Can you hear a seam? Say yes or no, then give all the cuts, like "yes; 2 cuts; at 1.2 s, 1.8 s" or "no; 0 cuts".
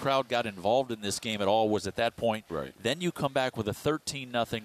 no; 0 cuts